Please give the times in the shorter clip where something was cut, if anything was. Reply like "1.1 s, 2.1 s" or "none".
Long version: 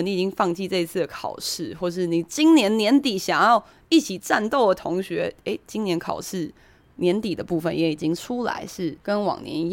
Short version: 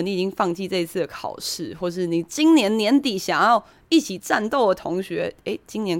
none